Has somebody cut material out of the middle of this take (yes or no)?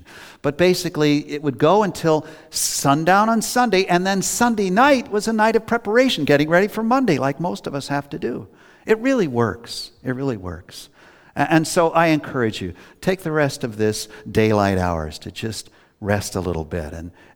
no